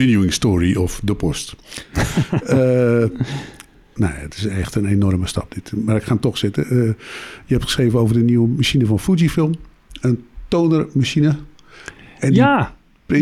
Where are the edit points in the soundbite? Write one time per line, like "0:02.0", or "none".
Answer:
0:04.0